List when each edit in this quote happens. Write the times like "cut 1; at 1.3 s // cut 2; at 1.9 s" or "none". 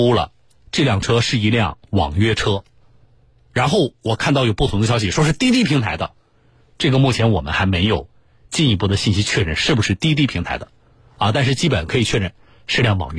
none